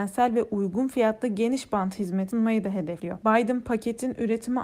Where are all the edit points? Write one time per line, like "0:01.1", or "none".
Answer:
none